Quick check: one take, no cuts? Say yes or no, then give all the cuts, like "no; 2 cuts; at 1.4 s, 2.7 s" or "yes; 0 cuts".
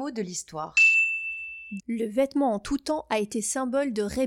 no; 1 cut; at 1.8 s